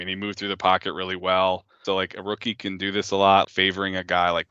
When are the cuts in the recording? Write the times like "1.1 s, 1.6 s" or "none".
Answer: 1.8 s, 3.4 s